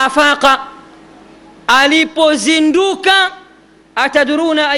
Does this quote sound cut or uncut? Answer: uncut